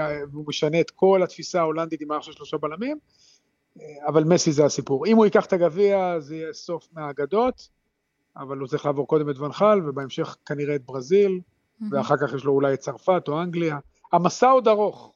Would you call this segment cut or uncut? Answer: uncut